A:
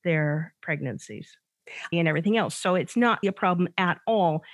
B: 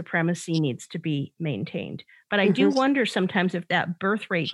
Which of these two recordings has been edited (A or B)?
A